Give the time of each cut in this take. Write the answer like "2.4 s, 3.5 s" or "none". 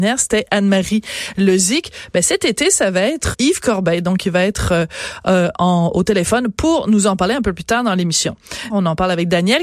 3.3 s, 8.7 s